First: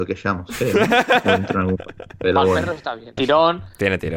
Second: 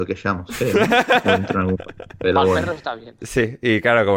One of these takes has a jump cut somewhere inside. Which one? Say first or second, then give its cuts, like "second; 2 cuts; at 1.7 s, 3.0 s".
first; 1 cut; at 3.2 s